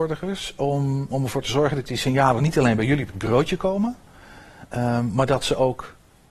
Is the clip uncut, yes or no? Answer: no